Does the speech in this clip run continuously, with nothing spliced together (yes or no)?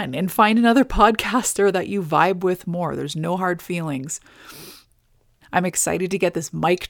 no